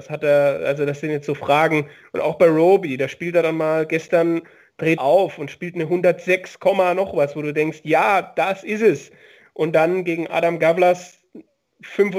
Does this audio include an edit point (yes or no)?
yes